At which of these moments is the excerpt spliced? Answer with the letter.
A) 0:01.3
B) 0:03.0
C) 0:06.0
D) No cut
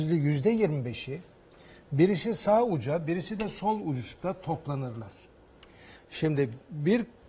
C